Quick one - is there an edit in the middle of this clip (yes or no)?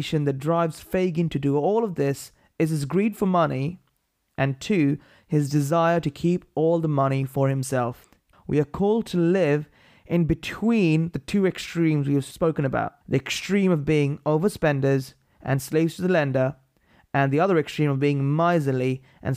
yes